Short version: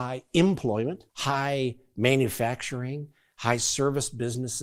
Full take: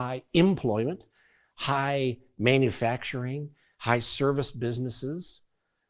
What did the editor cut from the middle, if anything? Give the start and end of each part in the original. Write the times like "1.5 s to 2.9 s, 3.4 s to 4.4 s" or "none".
1.1 s to 1.5 s